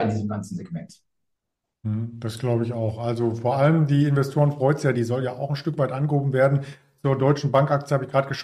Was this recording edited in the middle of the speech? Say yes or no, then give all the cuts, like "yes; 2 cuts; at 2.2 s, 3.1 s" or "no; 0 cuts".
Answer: yes; 1 cut; at 4.9 s